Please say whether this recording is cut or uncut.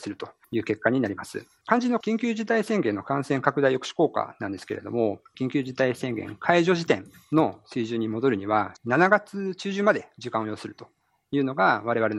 cut